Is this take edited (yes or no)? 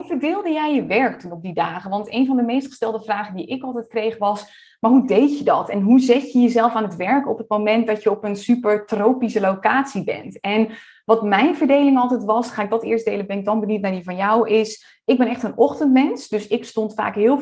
no